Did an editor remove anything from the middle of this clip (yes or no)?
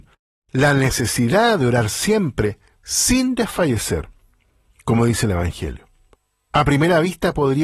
no